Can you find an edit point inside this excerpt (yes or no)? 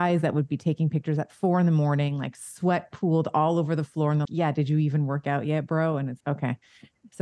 yes